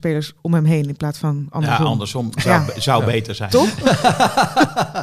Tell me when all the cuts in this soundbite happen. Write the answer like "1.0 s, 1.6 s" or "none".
none